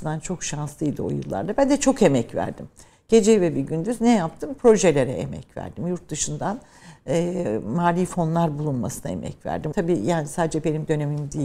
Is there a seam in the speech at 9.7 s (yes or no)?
yes